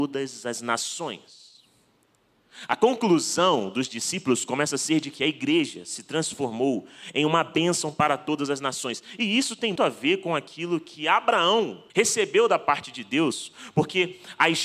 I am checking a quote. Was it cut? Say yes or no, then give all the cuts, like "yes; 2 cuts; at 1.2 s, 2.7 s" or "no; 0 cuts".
yes; 2 cuts; at 9.8 s, 11.9 s